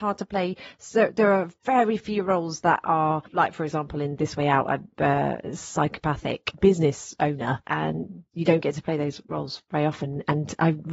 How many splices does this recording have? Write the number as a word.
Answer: zero